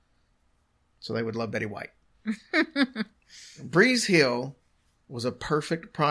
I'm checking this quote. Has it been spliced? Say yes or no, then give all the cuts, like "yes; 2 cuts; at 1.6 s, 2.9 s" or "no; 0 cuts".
no; 0 cuts